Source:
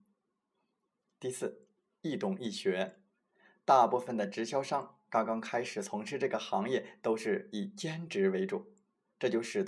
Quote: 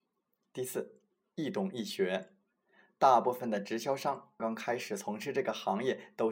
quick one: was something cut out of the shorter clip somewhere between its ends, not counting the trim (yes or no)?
yes